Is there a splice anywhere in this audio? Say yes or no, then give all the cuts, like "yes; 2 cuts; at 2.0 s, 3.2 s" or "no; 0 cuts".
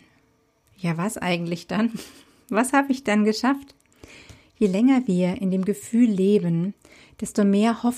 no; 0 cuts